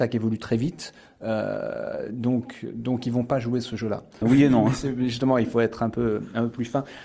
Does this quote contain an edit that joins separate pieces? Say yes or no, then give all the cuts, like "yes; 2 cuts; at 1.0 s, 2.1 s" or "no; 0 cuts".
yes; 1 cut; at 4.2 s